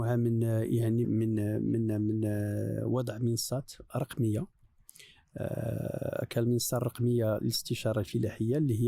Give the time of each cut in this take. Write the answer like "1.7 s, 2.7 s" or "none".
1.0 s